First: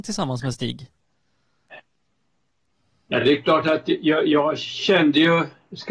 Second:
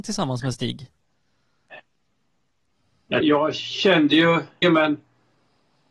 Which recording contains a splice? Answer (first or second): second